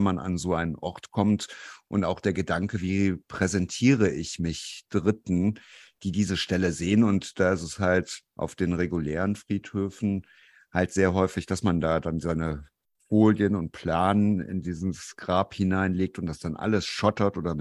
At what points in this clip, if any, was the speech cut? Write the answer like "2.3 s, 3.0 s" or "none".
none